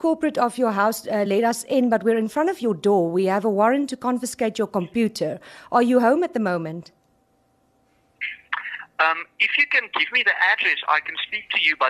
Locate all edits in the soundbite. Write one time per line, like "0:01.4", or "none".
none